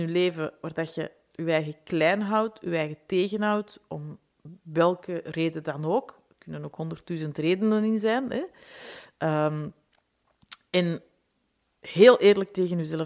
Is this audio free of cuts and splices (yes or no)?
yes